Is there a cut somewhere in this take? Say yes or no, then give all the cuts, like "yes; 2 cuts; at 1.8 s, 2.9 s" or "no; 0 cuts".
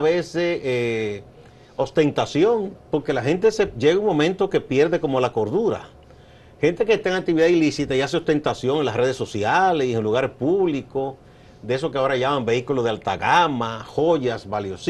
no; 0 cuts